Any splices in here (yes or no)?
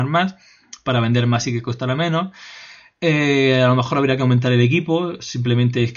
no